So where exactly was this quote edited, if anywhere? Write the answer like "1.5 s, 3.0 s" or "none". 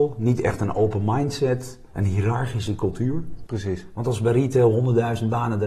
3.5 s